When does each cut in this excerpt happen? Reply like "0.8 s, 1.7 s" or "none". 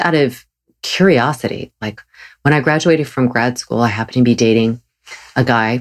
none